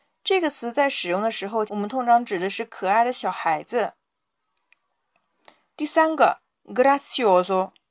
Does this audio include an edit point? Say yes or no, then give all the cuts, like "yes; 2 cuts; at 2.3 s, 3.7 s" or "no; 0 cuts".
yes; 1 cut; at 1.7 s